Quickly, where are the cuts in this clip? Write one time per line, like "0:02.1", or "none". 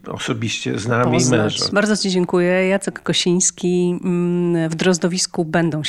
0:01.7

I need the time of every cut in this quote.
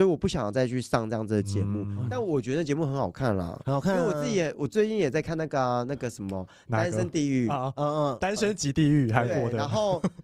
none

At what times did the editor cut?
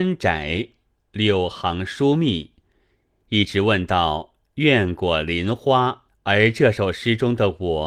0:06.1

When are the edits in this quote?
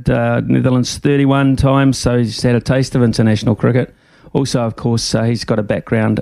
none

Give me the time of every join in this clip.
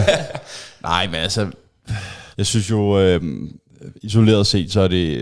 0:02.3

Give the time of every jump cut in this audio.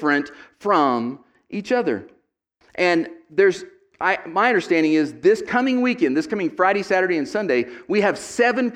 0:02.6

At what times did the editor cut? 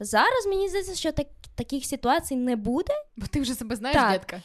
0:03.1

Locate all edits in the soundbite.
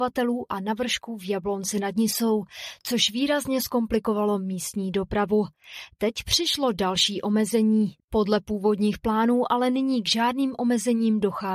0:08.0

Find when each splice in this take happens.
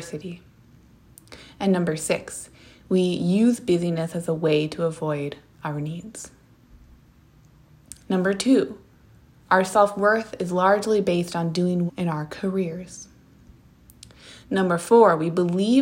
0:08.0
0:11.9
0:14.4

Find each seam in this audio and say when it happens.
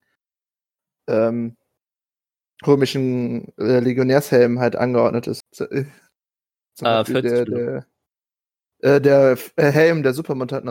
0:05.4

